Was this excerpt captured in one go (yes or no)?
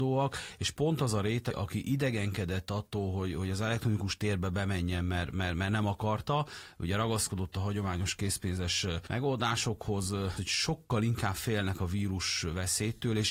no